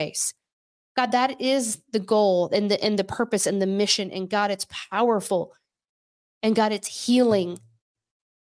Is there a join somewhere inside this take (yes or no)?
no